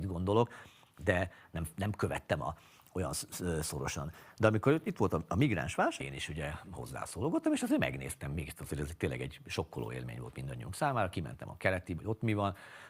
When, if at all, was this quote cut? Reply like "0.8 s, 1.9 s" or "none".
6.0 s, 12.0 s